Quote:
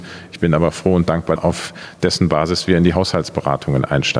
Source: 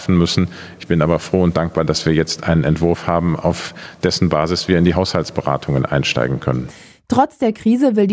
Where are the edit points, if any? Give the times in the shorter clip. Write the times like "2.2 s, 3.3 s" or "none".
1.4 s